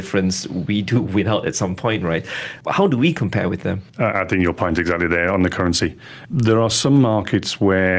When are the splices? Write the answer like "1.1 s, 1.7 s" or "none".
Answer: none